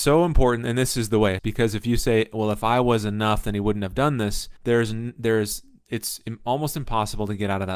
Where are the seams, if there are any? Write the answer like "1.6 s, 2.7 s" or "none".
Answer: 1.4 s, 4.6 s